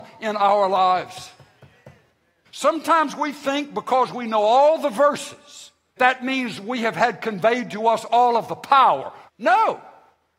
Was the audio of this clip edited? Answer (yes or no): yes